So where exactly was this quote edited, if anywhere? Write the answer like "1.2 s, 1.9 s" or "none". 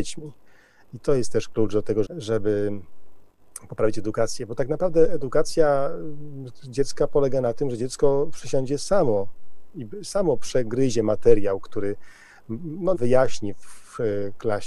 2.0 s, 12.9 s

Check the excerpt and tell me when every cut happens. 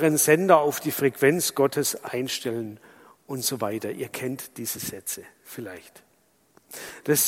none

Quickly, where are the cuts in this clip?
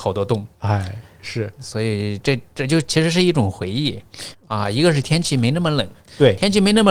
4.3 s

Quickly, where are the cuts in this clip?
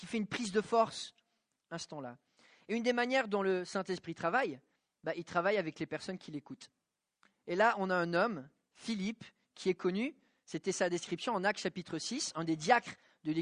1.6 s

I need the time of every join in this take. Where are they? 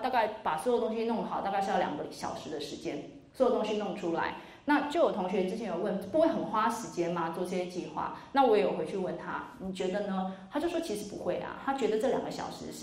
none

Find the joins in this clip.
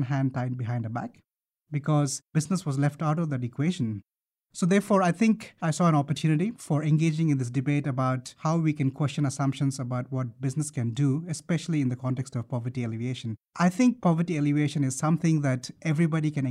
none

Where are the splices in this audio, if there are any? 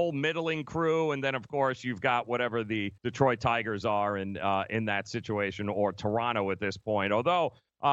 3.0 s

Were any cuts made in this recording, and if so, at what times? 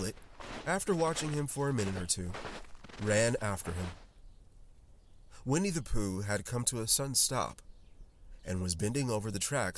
none

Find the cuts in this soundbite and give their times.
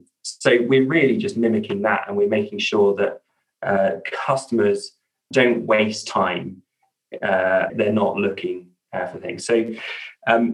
5.3 s, 7.7 s

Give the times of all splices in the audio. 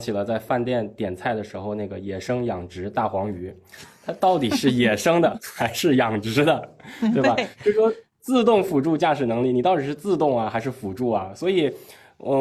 none

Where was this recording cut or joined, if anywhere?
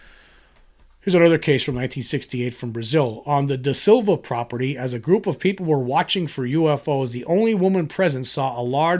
none

